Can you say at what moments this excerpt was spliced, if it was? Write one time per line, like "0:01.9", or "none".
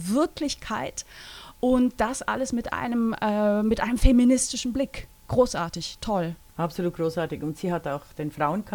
none